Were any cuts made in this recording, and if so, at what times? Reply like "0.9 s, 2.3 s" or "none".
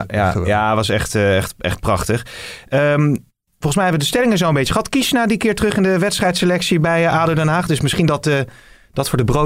none